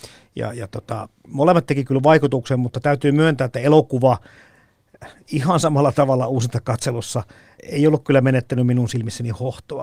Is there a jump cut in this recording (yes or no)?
no